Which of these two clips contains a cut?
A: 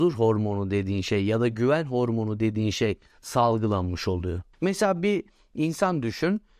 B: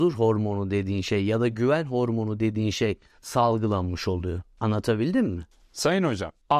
A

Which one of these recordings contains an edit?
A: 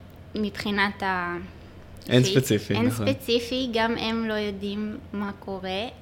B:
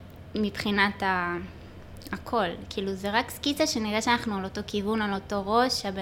A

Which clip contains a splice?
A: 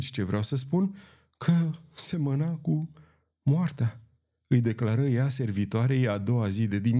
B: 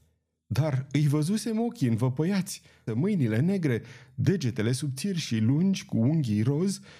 B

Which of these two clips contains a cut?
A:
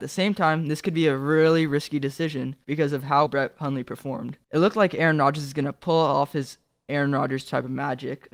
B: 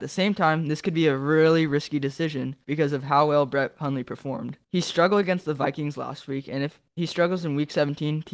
A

